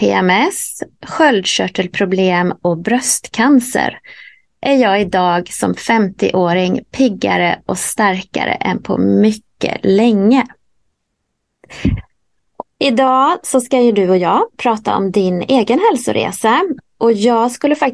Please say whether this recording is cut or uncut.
cut